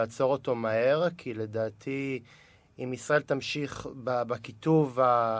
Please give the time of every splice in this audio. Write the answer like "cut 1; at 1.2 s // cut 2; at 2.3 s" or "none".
none